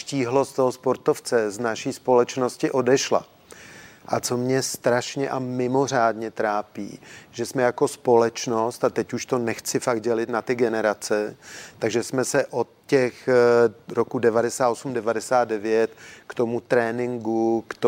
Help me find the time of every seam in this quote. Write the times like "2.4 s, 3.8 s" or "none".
4.0 s